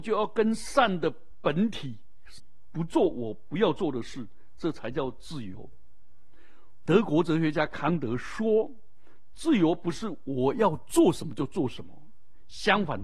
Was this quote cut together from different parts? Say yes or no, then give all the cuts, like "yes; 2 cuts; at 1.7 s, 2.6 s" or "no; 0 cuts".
yes; 2 cuts; at 2.4 s, 6.9 s